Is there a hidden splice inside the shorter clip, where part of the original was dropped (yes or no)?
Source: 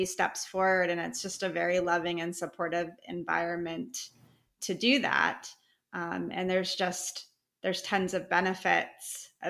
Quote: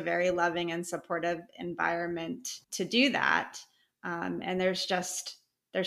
yes